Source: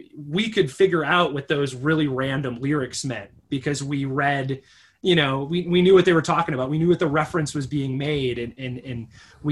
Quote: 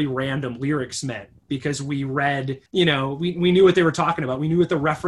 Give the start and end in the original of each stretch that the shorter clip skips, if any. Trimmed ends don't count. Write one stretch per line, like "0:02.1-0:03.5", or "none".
0:04.7-0:05.0